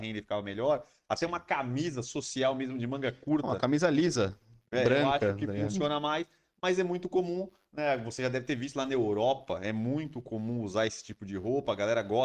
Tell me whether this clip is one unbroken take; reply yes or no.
yes